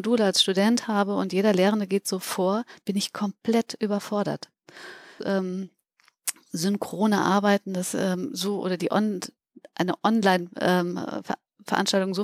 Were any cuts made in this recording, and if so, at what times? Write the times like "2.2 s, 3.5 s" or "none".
5.2 s